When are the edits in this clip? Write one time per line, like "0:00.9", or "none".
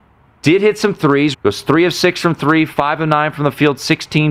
0:01.3